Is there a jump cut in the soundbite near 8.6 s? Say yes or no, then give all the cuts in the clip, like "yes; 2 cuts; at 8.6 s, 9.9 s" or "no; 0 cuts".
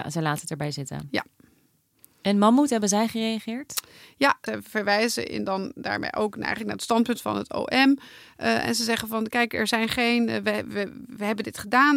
no; 0 cuts